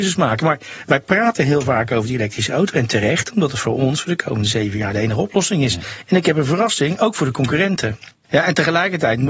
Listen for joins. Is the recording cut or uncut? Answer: uncut